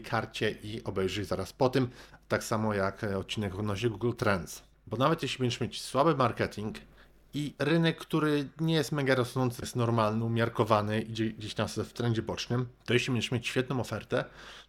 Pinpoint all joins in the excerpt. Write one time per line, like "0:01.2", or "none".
0:04.7
0:09.6